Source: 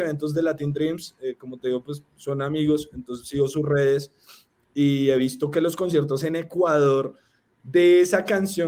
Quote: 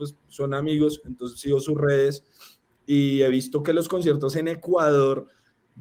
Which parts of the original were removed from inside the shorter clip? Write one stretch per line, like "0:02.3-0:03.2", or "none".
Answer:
none